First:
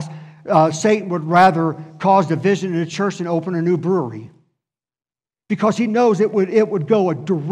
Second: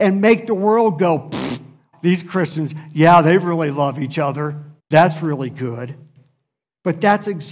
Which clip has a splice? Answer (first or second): second